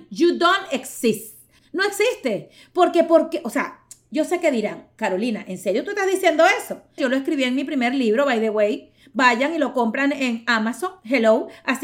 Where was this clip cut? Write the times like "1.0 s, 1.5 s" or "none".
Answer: 1.6 s, 7.0 s